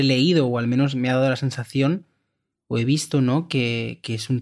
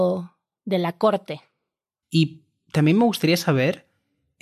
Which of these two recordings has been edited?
second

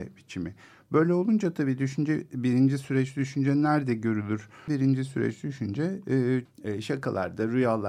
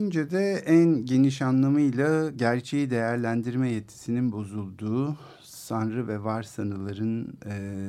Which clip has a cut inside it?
first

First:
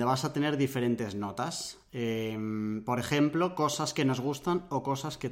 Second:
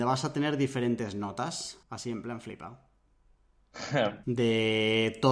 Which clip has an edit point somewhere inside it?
second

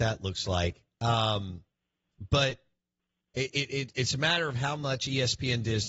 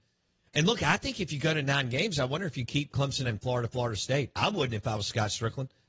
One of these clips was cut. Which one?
second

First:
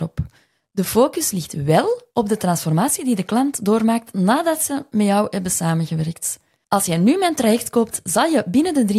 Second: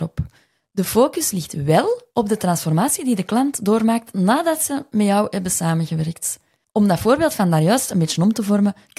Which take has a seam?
first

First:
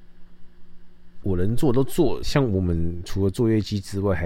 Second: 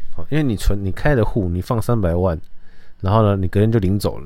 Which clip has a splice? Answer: first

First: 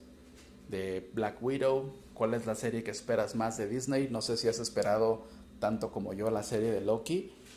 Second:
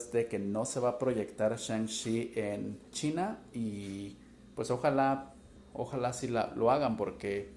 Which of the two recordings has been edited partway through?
second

